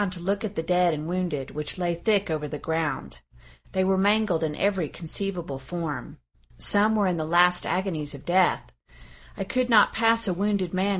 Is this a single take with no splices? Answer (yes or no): yes